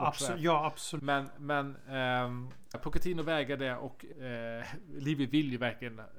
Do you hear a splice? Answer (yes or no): yes